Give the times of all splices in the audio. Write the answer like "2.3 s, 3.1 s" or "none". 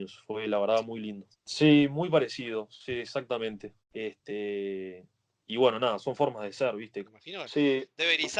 1.3 s, 3.8 s, 7.0 s